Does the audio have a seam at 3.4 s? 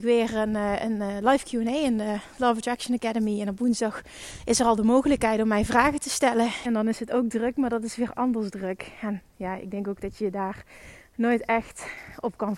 no; 1 cut; at 6.6 s

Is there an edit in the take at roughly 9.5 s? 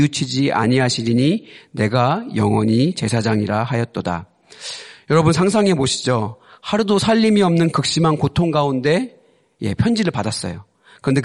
no; 0 cuts

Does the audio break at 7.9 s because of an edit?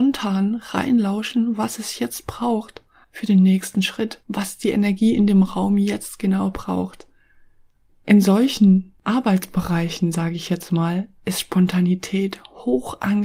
yes; 2 cuts; at 4.2 s, 7.9 s

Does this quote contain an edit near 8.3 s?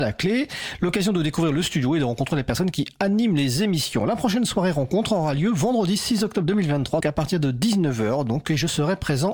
no; 1 cut; at 7.0 s

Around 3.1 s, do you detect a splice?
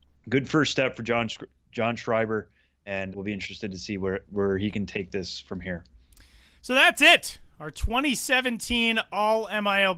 yes; 1 cut; at 3.1 s

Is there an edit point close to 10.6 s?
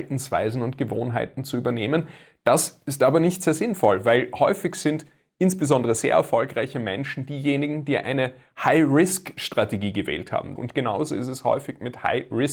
yes; 1 cut; at 10.6 s

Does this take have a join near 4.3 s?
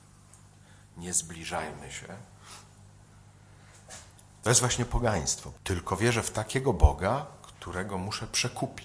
no; 1 cut; at 5.5 s

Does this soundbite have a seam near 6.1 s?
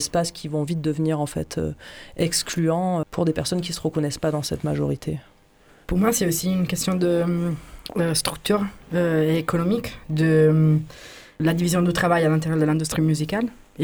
no; 2 cuts; at 3.0 s, 11.4 s

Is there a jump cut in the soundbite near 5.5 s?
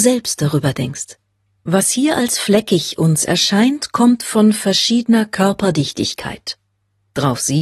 no; 1 cut; at 1.6 s

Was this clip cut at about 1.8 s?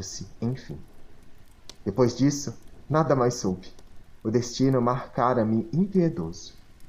no; 1 cut; at 4.2 s

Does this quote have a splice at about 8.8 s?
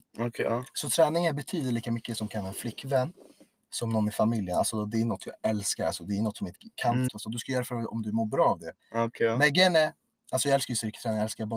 yes; 2 cuts; at 7.1 s, 8.8 s

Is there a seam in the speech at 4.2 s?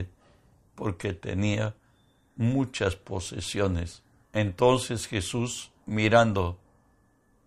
yes; 2 cuts; at 4.2 s, 5.8 s

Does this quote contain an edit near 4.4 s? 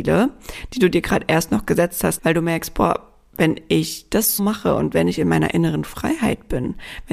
yes; 2 cuts; at 2.2 s, 4.4 s

